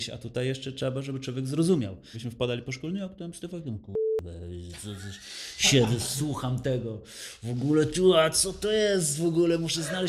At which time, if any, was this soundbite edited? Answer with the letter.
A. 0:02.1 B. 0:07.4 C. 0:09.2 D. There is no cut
A